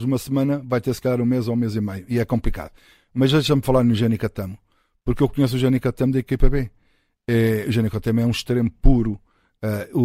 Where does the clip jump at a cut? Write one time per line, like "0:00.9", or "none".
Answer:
none